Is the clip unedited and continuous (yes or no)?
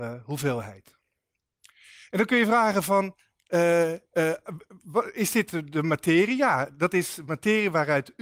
yes